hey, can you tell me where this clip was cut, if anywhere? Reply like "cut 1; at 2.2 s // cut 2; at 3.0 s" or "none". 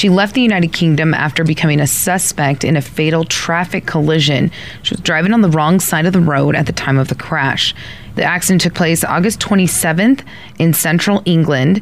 cut 1; at 8.1 s

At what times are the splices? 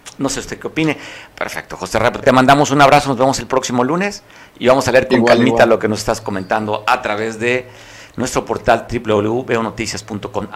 cut 1; at 1.3 s

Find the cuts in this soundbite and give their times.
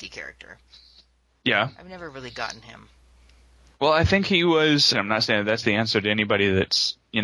cut 1; at 4.9 s

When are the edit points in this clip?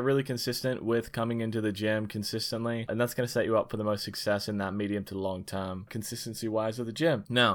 cut 1; at 5.9 s

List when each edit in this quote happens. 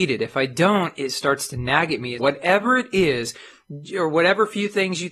cut 1; at 2.2 s

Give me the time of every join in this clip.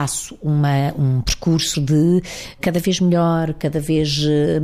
cut 1; at 1.7 s

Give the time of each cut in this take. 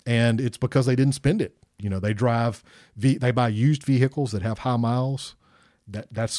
cut 1; at 1.8 s

